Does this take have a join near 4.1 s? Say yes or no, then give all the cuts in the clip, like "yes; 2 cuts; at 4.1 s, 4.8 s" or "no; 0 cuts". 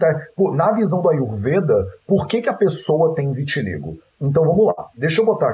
no; 0 cuts